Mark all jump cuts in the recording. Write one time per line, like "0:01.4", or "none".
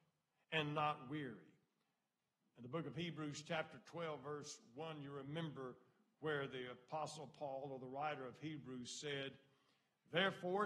none